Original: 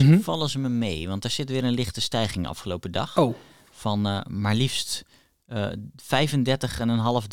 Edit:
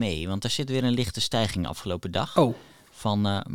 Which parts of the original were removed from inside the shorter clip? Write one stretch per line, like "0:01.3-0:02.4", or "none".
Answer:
none